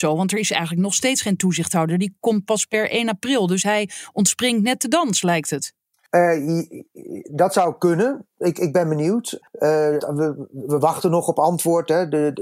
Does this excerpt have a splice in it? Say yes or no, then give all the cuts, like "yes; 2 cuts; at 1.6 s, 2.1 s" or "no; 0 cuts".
yes; 1 cut; at 10.0 s